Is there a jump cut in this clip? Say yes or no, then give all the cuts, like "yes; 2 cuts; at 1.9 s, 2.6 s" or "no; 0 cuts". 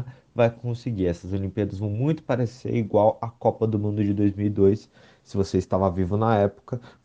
no; 0 cuts